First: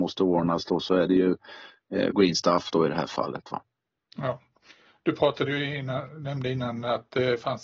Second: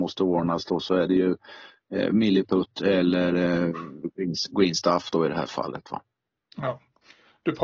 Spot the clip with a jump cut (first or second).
first